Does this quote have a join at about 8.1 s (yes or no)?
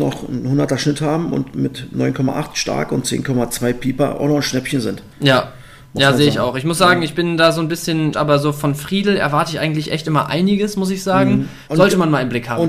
yes